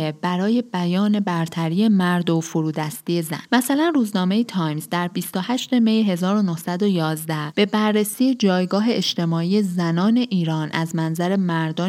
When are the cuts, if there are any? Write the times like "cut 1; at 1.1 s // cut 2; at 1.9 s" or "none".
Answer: cut 1; at 3.4 s